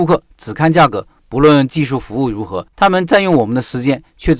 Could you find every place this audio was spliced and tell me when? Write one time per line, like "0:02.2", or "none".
0:02.7